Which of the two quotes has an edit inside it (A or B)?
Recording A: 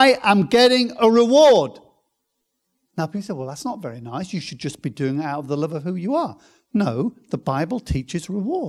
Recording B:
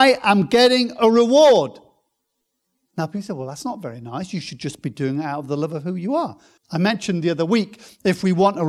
B